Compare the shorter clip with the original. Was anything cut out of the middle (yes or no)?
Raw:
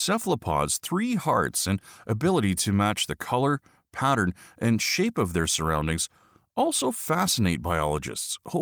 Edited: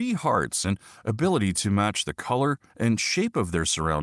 yes